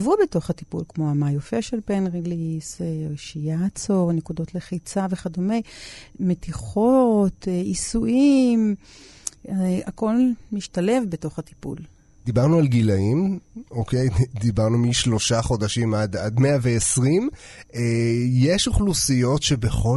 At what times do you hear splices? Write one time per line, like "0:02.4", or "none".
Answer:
none